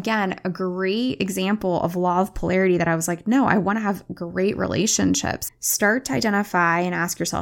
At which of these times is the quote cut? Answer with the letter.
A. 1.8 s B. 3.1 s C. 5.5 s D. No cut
C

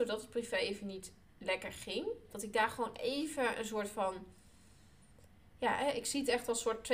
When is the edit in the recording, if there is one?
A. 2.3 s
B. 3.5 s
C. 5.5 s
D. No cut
A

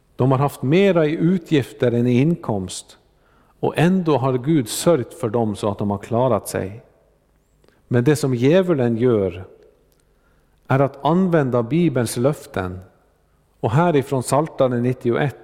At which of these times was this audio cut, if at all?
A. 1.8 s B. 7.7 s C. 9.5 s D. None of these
B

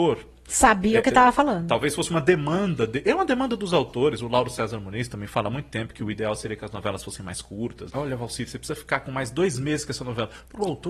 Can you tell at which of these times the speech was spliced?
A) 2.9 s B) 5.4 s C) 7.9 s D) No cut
C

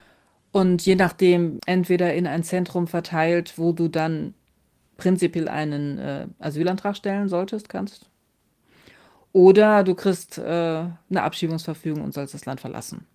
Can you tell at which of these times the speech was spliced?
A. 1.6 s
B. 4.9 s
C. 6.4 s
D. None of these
A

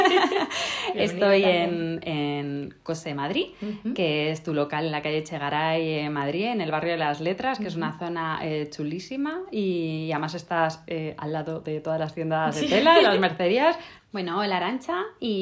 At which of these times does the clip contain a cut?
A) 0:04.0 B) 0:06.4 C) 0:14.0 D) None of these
C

